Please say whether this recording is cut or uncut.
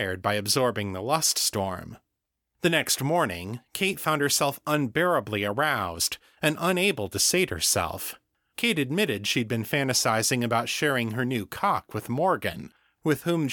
cut